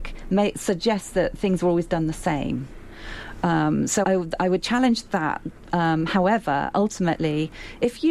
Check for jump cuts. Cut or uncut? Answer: cut